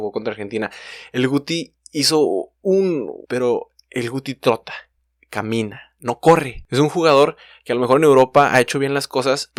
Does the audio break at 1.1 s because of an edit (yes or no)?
no